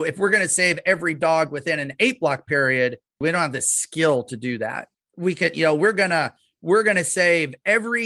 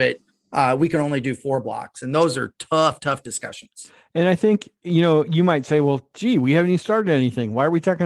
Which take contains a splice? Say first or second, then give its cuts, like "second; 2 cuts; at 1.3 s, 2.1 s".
first; 2 cuts; at 3.2 s, 4.9 s